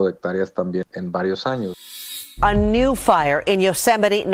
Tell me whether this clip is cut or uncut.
uncut